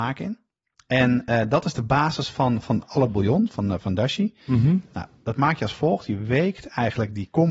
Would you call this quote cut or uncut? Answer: uncut